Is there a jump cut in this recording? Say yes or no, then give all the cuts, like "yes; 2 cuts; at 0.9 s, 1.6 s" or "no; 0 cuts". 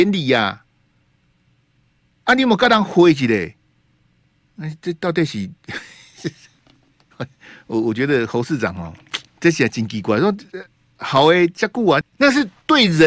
yes; 2 cuts; at 9.3 s, 12.0 s